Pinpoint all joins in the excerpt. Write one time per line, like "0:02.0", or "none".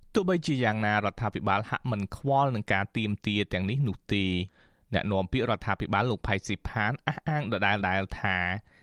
0:07.8